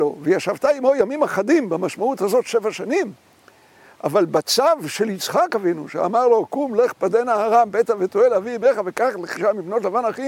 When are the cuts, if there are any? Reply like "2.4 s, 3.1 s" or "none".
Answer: 9.3 s